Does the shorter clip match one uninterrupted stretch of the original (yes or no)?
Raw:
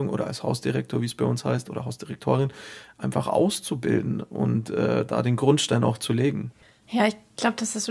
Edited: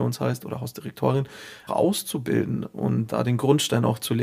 no